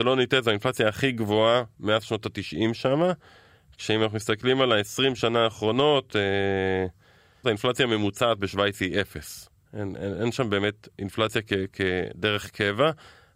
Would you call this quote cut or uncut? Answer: cut